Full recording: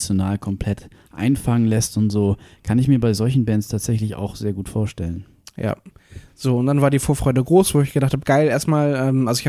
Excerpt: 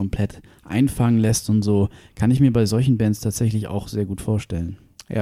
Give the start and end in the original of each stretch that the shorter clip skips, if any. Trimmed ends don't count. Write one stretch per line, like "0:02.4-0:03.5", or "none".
none